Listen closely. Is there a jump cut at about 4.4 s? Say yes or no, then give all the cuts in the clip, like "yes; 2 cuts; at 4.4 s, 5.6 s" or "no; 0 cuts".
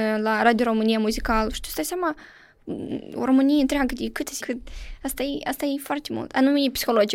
yes; 1 cut; at 4.4 s